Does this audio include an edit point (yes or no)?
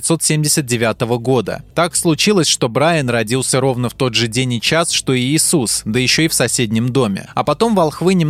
no